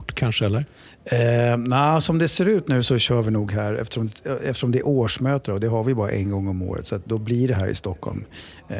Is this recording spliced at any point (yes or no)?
no